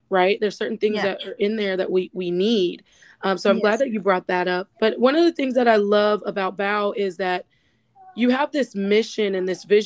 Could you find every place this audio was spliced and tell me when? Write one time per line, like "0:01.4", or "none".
0:04.7